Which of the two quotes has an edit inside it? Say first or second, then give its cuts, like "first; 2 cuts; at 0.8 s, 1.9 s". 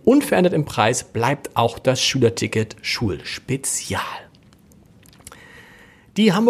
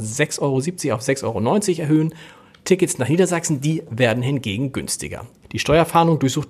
second; 1 cut; at 5.4 s